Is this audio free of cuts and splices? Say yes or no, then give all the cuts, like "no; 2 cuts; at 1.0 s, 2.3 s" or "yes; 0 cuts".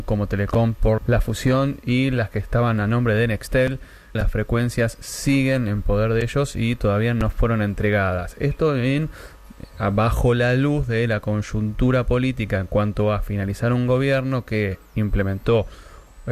no; 2 cuts; at 1.0 s, 4.2 s